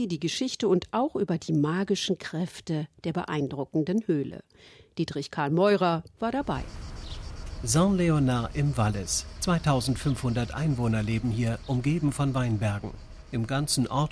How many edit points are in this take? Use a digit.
0